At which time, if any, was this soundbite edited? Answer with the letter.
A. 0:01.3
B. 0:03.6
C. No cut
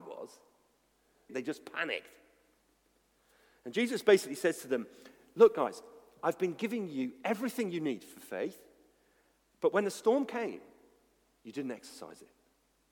A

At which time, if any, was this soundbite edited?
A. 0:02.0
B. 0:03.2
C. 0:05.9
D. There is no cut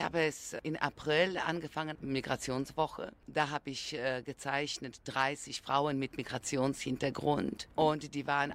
A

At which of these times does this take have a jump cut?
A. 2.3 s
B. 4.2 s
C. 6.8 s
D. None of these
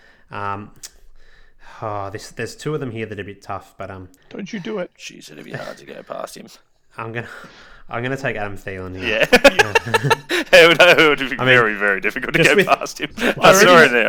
B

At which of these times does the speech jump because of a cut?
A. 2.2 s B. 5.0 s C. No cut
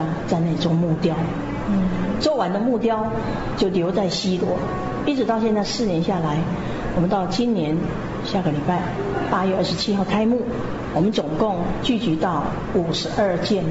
C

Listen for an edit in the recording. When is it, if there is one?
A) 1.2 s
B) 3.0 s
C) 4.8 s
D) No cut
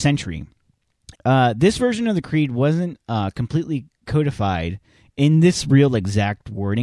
A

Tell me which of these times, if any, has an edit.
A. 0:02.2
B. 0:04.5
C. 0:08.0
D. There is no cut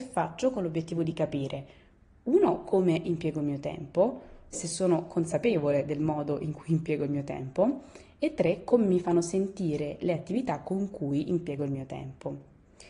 B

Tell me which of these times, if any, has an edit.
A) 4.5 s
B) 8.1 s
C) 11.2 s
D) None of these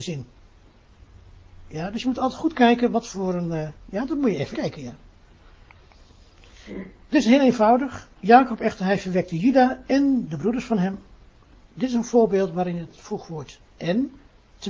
A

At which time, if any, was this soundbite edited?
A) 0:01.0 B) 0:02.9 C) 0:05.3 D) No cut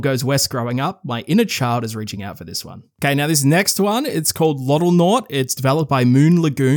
D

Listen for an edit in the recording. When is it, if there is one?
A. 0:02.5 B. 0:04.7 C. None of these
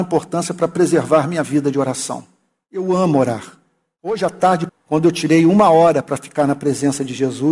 B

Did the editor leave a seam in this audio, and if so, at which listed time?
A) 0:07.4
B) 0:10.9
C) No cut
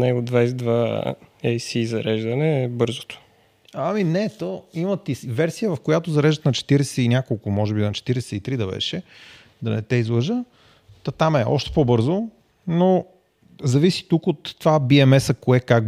C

